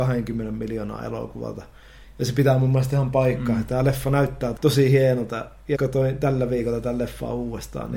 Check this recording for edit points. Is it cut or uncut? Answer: cut